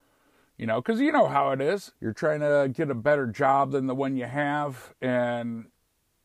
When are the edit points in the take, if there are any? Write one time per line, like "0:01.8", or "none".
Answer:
0:02.0